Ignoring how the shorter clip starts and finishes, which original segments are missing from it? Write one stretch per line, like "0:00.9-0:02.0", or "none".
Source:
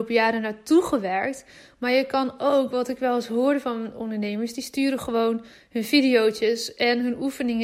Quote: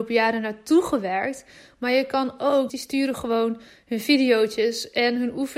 0:02.7-0:04.5

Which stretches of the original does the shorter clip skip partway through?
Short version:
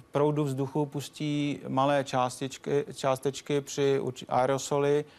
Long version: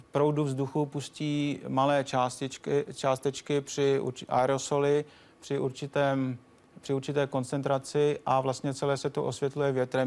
none

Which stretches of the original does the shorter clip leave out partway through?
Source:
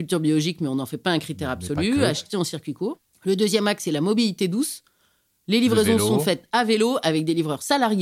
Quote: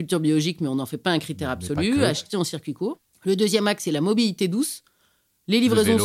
none

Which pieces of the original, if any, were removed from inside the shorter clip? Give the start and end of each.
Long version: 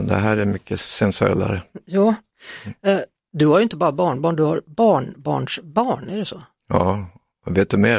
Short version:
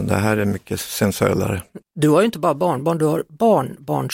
0:01.8-0:03.2

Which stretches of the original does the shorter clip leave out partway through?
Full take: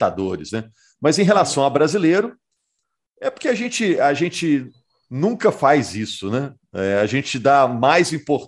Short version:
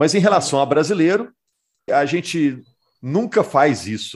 0:02.9-0:04.0

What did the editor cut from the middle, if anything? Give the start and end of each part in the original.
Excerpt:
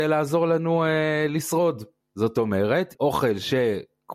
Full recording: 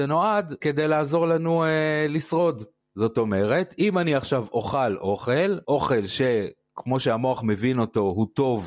0:03.7-0:05.6

